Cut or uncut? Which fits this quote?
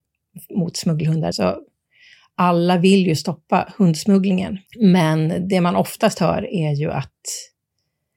cut